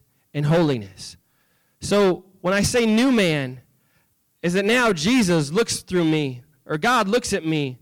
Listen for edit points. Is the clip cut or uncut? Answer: uncut